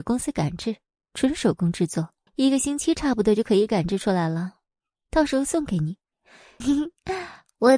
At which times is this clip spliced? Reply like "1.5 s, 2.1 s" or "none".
2.3 s, 6.6 s